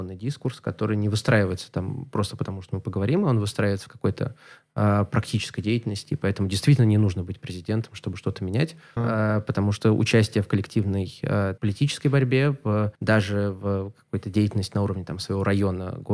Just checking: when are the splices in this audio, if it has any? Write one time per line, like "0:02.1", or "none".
0:09.0
0:11.6
0:12.9